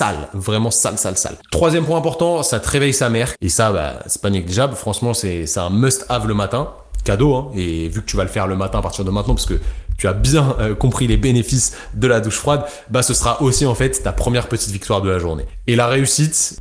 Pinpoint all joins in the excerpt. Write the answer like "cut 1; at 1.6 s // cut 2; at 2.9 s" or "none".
cut 1; at 3.3 s